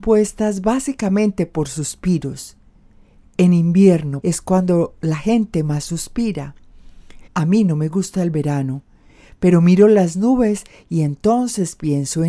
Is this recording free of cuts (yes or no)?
no